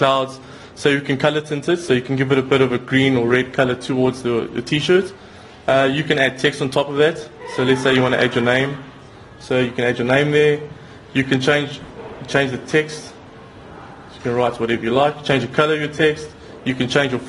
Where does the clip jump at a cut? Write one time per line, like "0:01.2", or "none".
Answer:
none